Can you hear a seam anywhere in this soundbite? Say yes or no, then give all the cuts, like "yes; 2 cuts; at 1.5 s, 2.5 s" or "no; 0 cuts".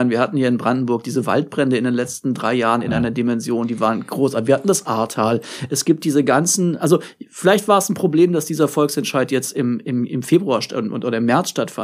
no; 0 cuts